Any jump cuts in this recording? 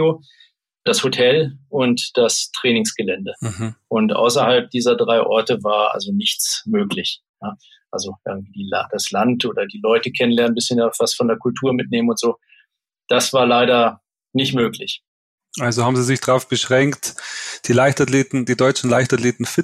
no; 0 cuts

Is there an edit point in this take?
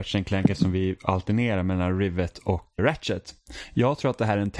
yes; 1 cut; at 2.8 s

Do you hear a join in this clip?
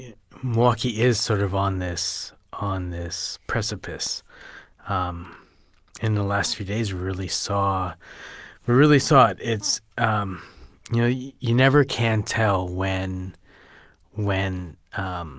no; 0 cuts

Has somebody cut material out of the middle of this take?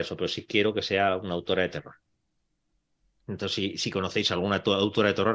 no; 0 cuts

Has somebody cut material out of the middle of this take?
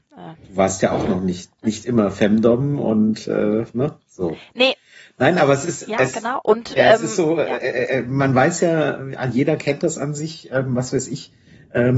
no; 0 cuts

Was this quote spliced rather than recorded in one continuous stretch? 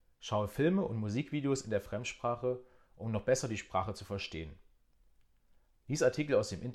no; 0 cuts

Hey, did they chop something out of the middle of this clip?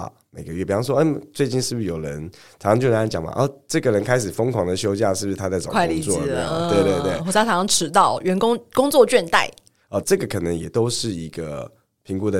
yes; 1 cut; at 10.0 s

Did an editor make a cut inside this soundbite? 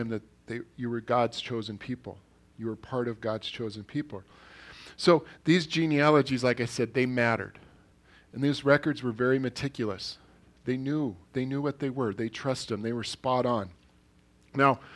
no; 0 cuts

